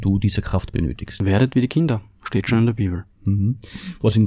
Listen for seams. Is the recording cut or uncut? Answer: uncut